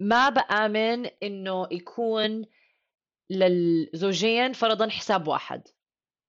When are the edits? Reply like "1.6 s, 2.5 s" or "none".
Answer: none

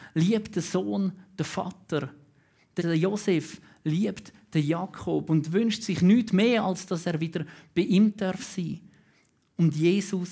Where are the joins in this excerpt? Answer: 2.8 s

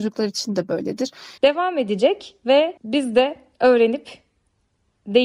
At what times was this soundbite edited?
1.4 s, 2.8 s

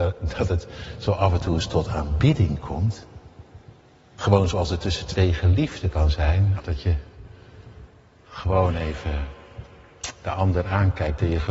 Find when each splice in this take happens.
6.6 s

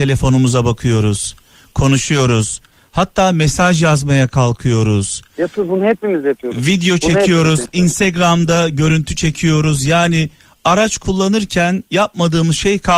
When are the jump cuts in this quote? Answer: none

